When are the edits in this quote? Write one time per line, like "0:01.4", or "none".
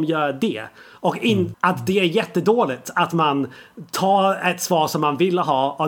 0:01.5